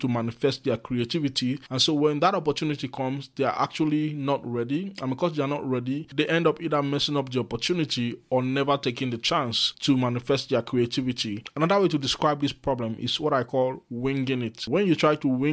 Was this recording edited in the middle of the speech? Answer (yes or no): no